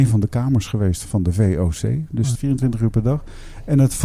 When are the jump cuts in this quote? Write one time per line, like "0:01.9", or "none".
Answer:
0:01.0
0:02.3